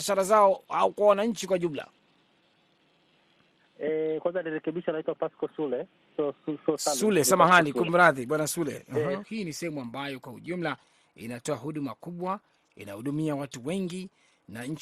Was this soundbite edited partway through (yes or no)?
yes